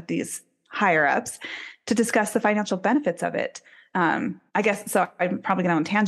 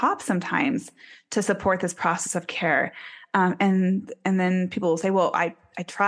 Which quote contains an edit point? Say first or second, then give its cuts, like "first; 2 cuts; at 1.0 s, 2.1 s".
first; 1 cut; at 4.5 s